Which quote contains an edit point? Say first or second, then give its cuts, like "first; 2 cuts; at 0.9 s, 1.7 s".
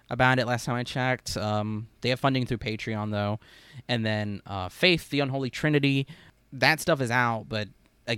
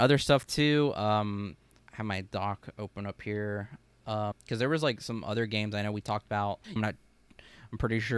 second; 2 cuts; at 4.3 s, 6.8 s